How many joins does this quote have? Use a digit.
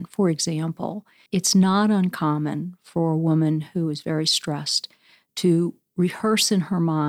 1